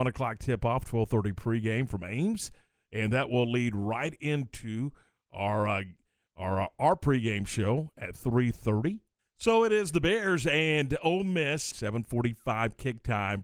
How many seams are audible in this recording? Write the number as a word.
two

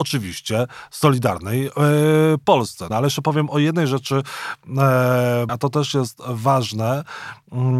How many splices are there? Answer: two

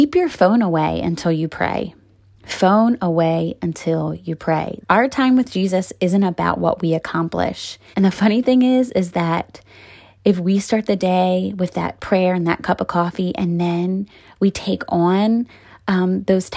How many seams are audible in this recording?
two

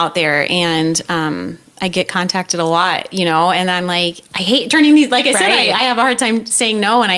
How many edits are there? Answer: zero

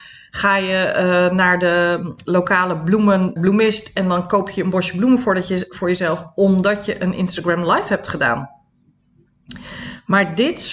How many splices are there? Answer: one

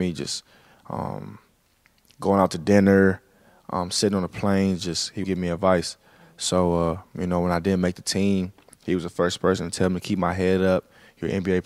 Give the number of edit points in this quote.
one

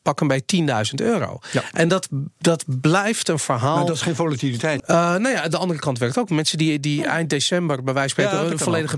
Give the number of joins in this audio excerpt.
one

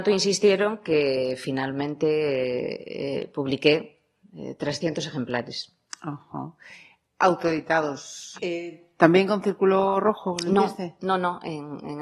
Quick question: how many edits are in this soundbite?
one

